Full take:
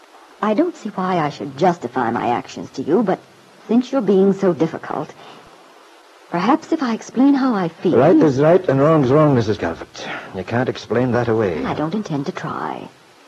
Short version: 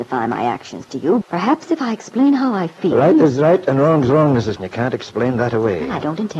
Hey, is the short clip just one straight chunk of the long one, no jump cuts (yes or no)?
no